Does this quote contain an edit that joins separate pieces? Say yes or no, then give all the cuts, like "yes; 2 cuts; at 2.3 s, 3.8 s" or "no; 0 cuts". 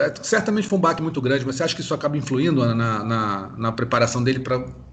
no; 0 cuts